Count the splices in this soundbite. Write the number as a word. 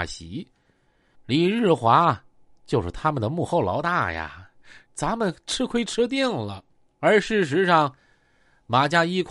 three